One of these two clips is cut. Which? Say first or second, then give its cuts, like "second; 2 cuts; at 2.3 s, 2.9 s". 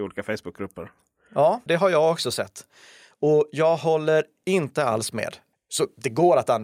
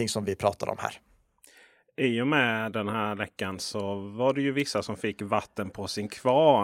first; 2 cuts; at 1.7 s, 5.5 s